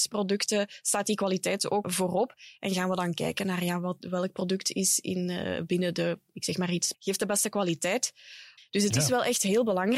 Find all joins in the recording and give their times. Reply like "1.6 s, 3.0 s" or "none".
1.8 s, 6.9 s, 8.6 s